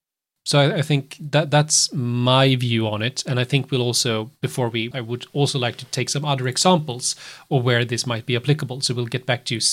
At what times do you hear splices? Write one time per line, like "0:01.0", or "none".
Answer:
0:04.9

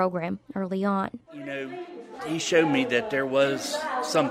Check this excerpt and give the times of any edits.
0:02.2

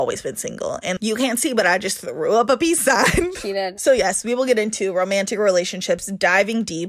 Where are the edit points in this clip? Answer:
0:03.8

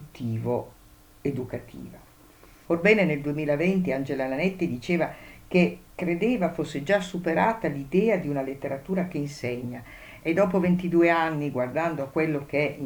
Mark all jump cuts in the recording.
0:02.7
0:05.9

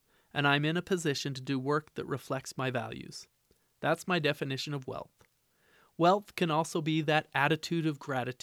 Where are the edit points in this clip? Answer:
none

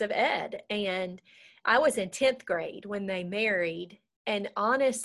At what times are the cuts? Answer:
0:04.1

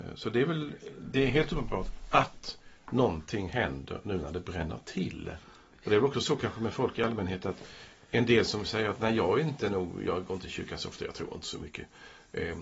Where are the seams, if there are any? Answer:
0:05.4

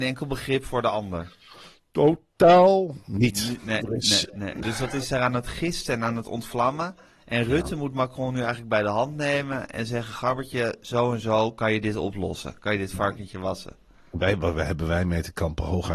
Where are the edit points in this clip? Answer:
0:04.6

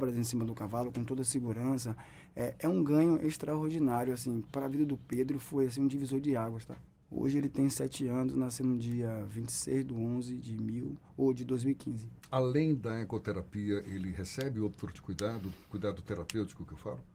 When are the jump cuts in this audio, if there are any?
0:07.0
0:14.9

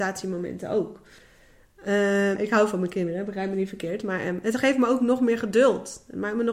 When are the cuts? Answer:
0:02.4

